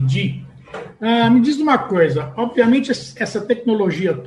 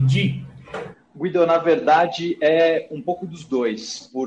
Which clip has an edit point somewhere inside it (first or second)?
second